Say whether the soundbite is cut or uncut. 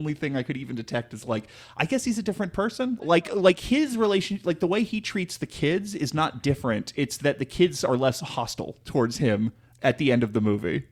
uncut